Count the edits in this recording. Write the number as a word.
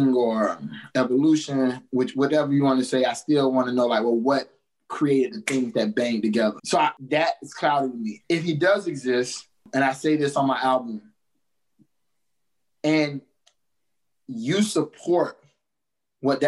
two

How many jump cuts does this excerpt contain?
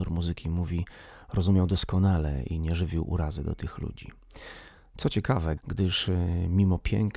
one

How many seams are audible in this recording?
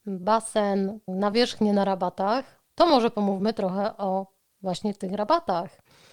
one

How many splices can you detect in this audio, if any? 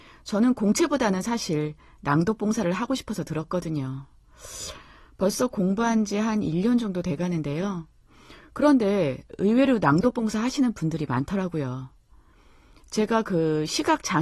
zero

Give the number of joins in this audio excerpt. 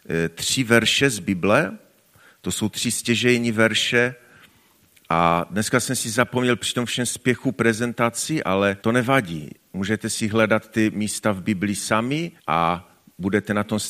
two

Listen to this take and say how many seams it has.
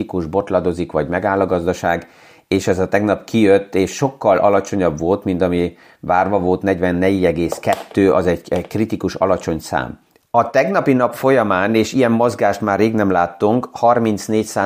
one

